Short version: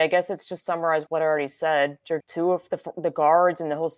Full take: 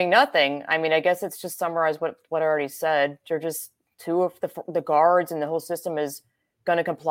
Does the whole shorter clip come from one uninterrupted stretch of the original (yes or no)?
no